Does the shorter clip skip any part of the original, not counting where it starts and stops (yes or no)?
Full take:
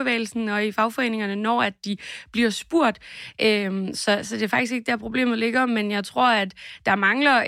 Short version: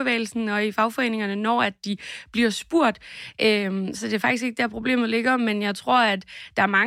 yes